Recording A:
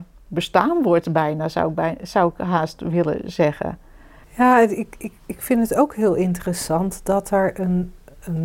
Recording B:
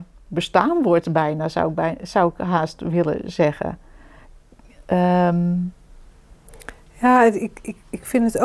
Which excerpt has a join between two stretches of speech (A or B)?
A